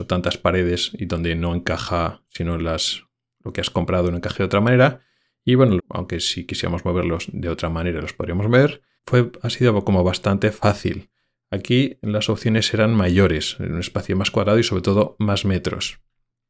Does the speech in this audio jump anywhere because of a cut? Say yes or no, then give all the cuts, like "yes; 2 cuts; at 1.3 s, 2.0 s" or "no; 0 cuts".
yes; 2 cuts; at 5.8 s, 9.0 s